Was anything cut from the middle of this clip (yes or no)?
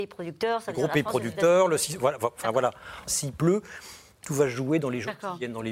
yes